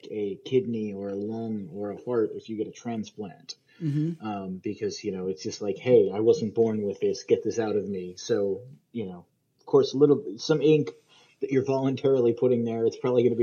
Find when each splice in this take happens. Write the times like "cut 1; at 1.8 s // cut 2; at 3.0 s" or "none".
none